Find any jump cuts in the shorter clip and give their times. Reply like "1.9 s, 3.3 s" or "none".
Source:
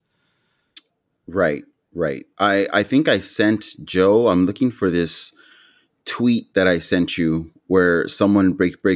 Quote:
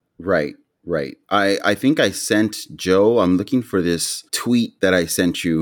4.3 s